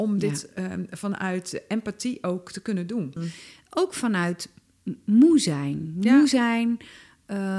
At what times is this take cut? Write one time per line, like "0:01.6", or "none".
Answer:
0:03.2